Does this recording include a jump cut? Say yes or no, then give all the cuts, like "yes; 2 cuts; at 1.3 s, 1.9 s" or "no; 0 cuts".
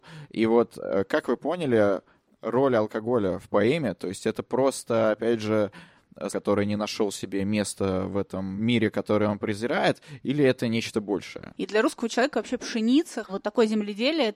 yes; 3 cuts; at 6.3 s, 11.5 s, 13.2 s